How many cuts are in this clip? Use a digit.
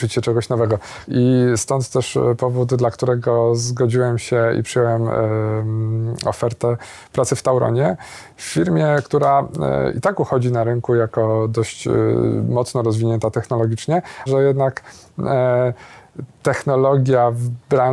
2